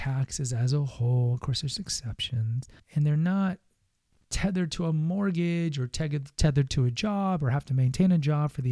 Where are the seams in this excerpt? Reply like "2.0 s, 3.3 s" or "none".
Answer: 2.8 s